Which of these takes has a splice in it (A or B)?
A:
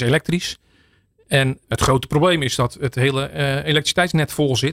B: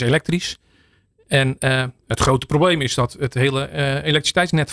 A